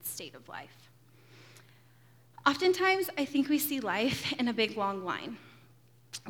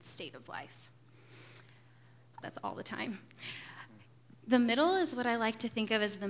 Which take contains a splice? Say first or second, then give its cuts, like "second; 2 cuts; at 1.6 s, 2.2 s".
second; 2 cuts; at 2.4 s, 4.3 s